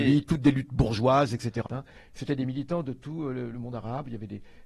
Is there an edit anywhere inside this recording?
yes; 2 cuts; at 1.7 s, 3.5 s

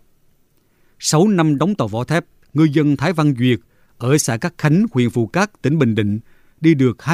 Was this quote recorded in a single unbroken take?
yes; 0 cuts

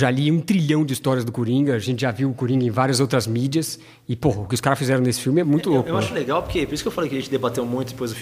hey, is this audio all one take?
no; 1 cut; at 5.4 s

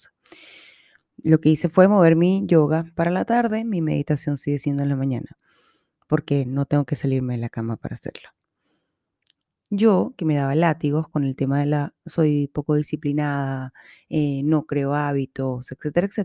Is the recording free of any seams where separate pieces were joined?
no; 1 cut; at 9.6 s

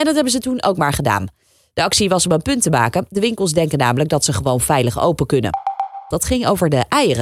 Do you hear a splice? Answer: yes; 1 cut; at 6.1 s

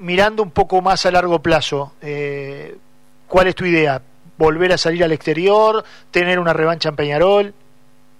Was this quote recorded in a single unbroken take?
yes; 0 cuts

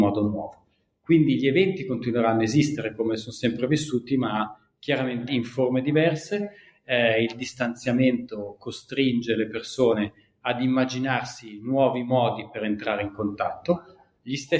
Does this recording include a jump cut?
yes; 1 cut; at 5.3 s

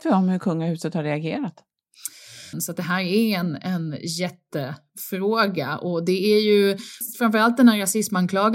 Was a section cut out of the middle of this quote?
yes; 2 cuts; at 2.5 s, 7.0 s

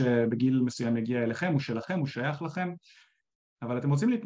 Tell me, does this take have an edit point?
no; 0 cuts

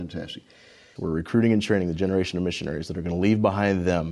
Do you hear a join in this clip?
yes; 1 cut; at 1.0 s

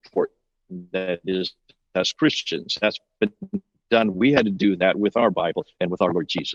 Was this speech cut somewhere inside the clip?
no; 0 cuts

